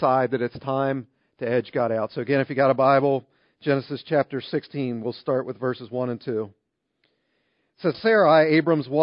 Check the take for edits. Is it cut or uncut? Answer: cut